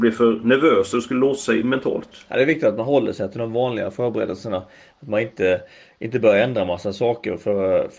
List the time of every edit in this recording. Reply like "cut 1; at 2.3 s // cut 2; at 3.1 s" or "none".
none

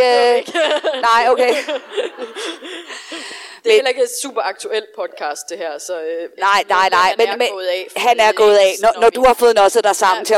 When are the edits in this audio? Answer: none

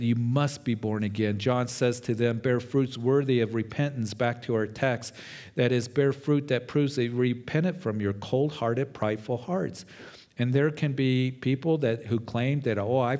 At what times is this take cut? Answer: none

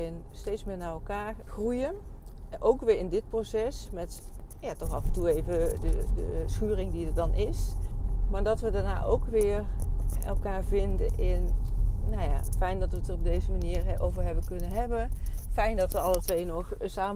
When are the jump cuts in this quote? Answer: none

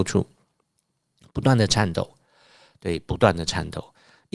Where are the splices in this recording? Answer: none

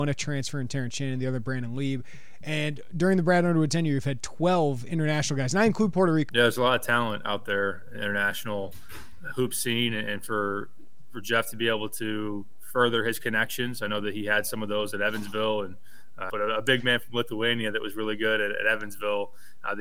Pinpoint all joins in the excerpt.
cut 1; at 6.3 s // cut 2; at 16.3 s

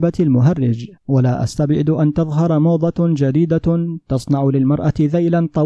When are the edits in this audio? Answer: cut 1; at 1.0 s

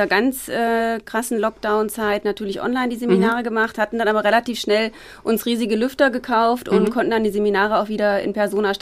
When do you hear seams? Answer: none

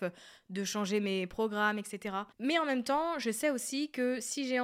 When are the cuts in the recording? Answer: cut 1; at 2.3 s

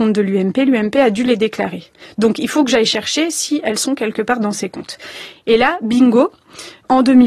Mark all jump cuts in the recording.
none

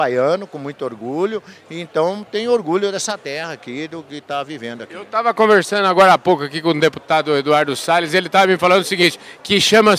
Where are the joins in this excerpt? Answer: none

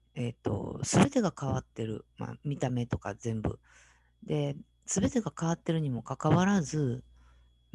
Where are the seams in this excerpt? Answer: none

